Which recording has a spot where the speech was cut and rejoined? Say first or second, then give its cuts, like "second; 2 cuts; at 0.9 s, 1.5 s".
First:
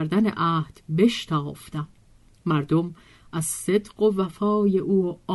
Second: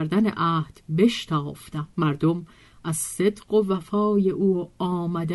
second; 1 cut; at 1.9 s